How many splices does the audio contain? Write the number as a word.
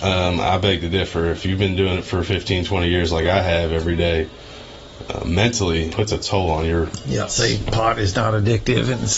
two